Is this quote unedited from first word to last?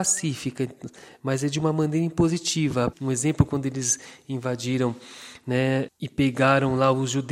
no; 2 cuts; at 2.9 s, 5.9 s

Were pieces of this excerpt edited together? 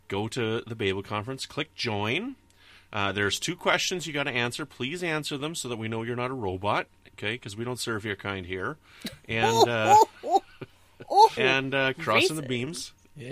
yes; 1 cut; at 11.4 s

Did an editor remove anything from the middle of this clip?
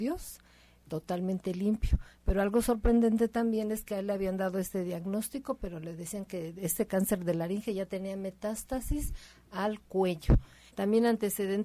yes; 1 cut; at 10.7 s

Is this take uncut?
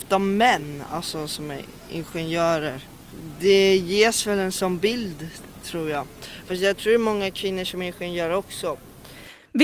yes; 0 cuts

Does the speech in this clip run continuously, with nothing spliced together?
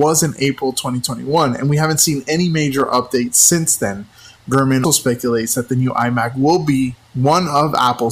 no; 1 cut; at 4.8 s

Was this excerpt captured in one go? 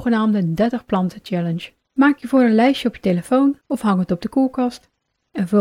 no; 2 cuts; at 1.8 s, 3.6 s

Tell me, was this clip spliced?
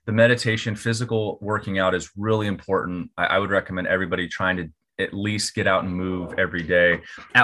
no; 0 cuts

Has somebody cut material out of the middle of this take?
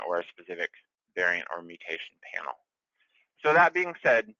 no; 0 cuts

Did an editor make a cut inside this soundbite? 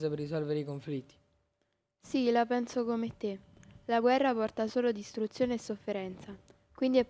no; 0 cuts

